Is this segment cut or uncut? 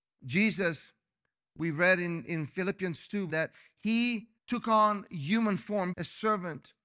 cut